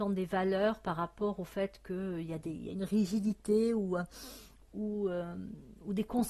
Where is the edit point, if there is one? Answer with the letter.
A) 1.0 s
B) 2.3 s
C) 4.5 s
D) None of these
D